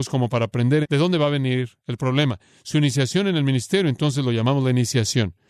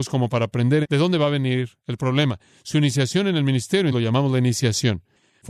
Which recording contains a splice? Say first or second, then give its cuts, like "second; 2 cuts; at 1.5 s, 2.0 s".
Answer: second; 1 cut; at 3.9 s